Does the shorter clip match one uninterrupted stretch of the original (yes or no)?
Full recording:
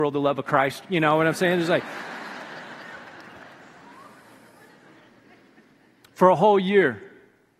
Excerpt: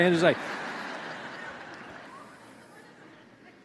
no